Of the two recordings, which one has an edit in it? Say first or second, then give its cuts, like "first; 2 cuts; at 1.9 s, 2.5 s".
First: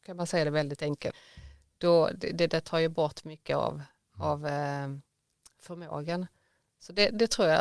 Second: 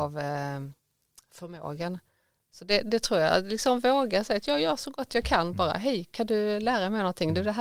first; 1 cut; at 1.1 s